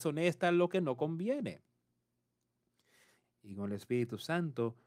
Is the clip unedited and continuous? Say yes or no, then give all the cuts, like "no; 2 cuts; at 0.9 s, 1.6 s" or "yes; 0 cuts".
no; 1 cut; at 3.2 s